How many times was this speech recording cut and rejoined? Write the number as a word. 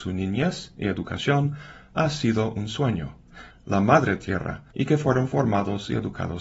two